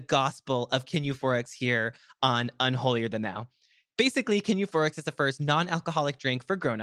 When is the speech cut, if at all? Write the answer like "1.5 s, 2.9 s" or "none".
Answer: none